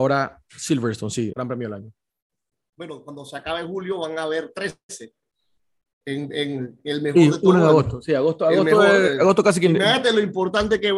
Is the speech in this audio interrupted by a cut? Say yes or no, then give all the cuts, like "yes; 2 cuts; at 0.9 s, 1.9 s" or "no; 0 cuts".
yes; 2 cuts; at 1.3 s, 5.9 s